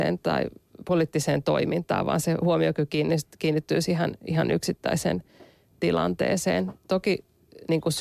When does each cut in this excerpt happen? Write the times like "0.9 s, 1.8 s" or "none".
none